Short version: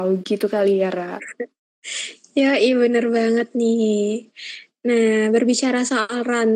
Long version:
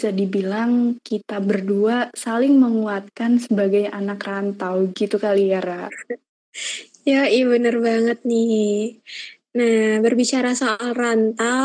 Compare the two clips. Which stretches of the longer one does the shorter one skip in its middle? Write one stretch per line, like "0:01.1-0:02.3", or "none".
none